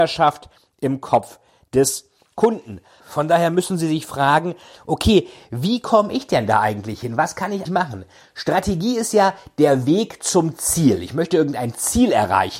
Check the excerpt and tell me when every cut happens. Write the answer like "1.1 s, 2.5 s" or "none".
3.0 s, 7.7 s